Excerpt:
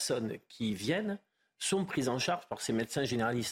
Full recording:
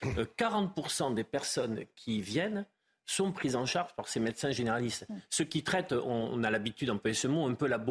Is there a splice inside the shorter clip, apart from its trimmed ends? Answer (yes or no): no